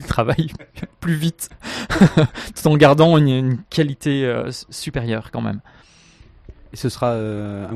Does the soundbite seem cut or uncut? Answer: uncut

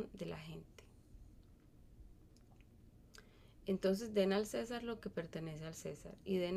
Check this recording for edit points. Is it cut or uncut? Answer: cut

